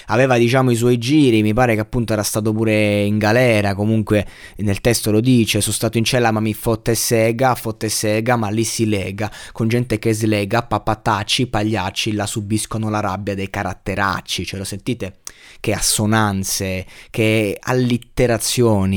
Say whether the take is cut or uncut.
uncut